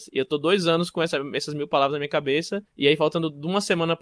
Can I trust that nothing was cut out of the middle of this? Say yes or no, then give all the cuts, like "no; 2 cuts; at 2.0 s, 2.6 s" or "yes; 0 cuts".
no; 1 cut; at 2.7 s